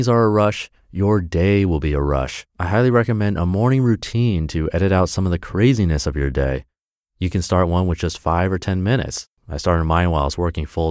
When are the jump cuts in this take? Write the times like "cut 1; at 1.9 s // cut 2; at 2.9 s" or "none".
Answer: cut 1; at 2.5 s